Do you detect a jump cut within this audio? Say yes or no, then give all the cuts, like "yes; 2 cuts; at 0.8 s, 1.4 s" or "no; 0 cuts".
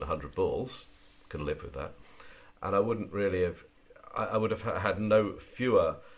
no; 0 cuts